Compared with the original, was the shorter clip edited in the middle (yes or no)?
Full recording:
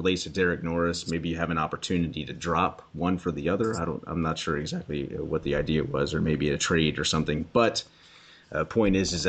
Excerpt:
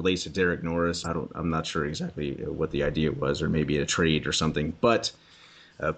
yes